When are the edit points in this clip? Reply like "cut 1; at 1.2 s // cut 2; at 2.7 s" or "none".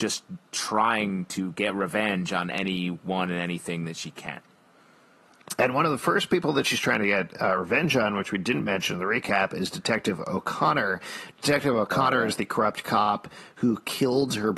none